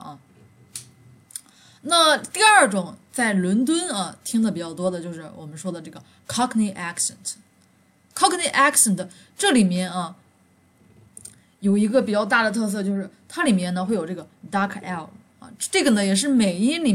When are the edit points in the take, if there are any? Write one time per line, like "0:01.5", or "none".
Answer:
none